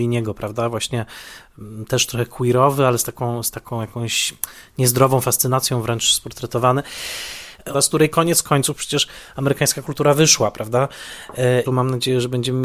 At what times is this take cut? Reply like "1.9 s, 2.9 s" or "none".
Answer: 7.7 s, 11.7 s